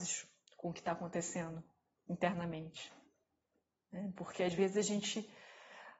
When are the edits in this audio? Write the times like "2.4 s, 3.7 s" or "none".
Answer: none